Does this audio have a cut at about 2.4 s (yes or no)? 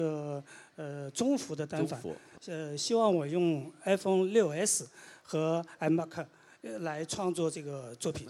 yes